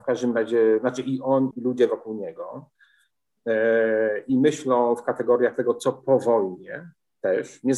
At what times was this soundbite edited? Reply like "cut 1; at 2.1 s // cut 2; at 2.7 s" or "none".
cut 1; at 1.5 s